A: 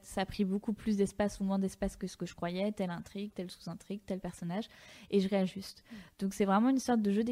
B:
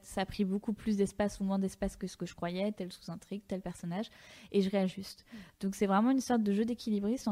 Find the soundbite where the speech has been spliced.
B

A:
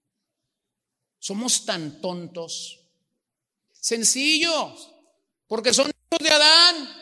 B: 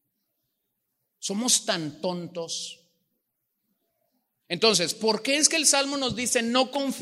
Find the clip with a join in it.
A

